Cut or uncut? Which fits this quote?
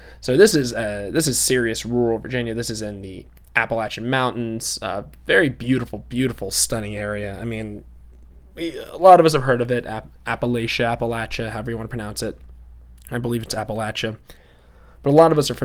uncut